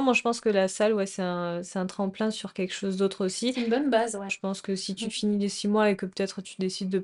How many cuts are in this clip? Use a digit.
1